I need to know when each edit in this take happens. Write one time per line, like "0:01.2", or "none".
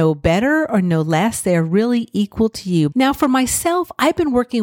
0:02.9